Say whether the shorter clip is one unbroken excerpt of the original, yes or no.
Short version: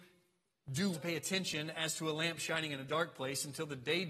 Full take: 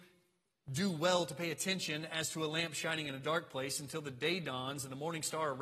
no